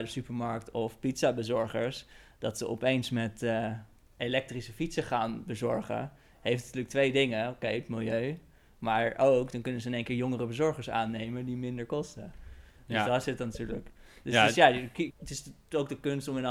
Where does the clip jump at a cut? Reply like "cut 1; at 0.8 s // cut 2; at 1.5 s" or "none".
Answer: cut 1; at 15.1 s

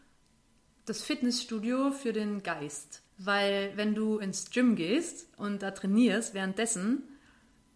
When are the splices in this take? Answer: cut 1; at 3.1 s

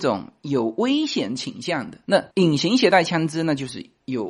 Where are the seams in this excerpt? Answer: cut 1; at 2.3 s

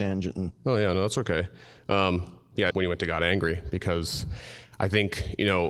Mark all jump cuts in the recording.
cut 1; at 2.7 s

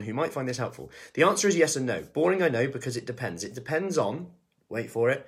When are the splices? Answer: none

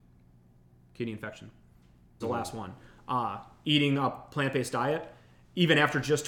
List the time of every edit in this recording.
cut 1; at 2.2 s

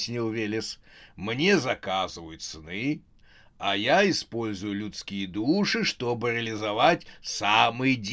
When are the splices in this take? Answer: none

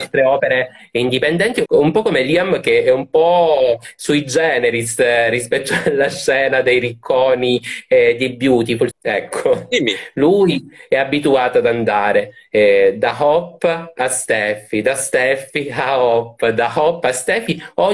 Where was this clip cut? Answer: cut 1; at 1.7 s // cut 2; at 8.9 s

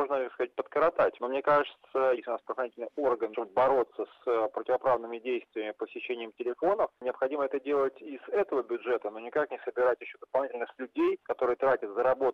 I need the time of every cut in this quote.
cut 1; at 2.2 s // cut 2; at 3.3 s

